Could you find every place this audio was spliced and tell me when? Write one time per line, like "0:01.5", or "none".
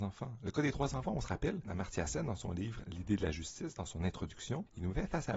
0:01.6